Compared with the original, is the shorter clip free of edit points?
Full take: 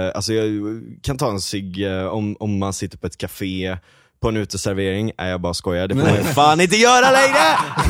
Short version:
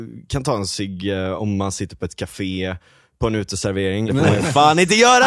no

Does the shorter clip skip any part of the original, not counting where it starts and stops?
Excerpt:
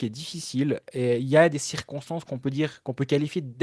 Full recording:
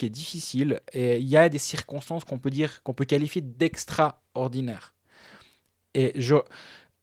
no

